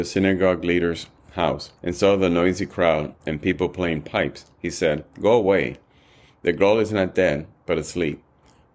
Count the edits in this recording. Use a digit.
1